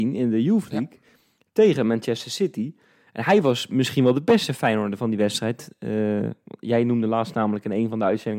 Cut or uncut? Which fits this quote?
uncut